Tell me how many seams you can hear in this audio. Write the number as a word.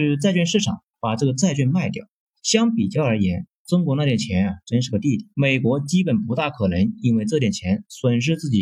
two